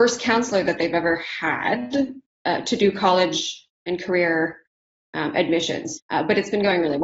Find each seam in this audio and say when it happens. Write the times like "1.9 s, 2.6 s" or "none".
6.0 s